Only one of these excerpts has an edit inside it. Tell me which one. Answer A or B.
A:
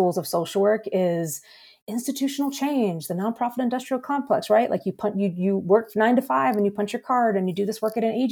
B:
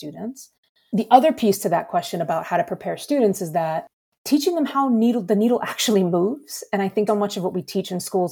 B